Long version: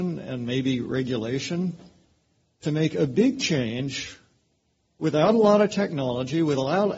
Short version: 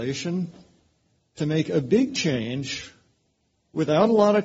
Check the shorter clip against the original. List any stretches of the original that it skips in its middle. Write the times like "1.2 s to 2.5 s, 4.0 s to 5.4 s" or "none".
none